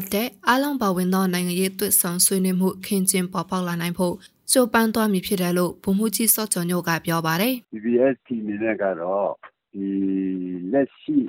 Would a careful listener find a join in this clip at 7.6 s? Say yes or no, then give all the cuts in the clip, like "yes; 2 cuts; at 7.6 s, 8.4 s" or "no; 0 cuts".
yes; 1 cut; at 7.6 s